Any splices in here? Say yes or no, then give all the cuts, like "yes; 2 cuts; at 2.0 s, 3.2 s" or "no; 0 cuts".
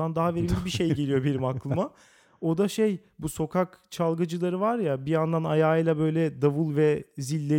no; 0 cuts